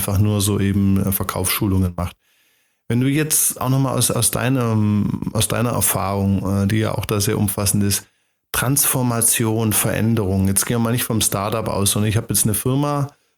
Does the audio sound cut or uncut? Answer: uncut